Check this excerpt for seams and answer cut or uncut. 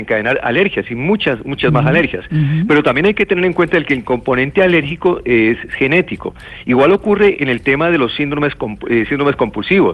uncut